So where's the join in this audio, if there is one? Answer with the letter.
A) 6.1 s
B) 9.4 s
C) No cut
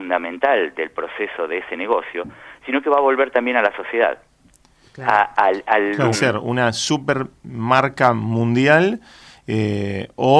A